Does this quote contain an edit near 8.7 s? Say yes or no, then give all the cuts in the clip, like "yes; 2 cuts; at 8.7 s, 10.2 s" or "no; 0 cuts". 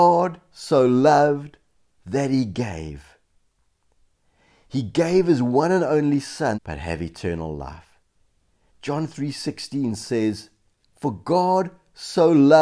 yes; 2 cuts; at 6.5 s, 8.7 s